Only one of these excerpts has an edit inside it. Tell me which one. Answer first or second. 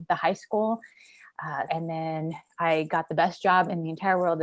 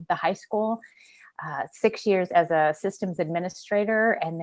first